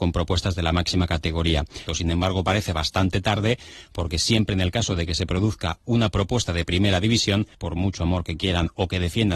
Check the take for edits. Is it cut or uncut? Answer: cut